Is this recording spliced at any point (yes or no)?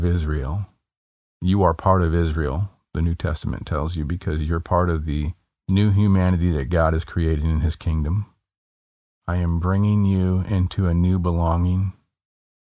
yes